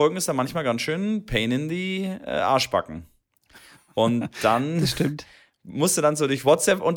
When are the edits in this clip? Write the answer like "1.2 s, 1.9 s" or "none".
none